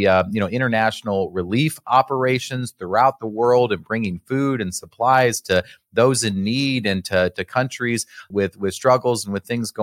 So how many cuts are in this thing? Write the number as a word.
one